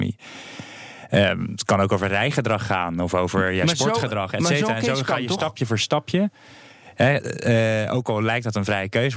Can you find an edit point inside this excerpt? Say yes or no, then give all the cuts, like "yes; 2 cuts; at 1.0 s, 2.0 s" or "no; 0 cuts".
no; 0 cuts